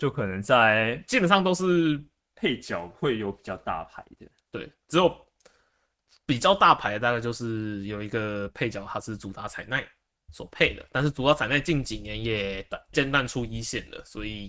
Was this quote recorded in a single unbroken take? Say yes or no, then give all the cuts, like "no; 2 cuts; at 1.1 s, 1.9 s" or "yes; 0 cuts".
no; 1 cut; at 12.9 s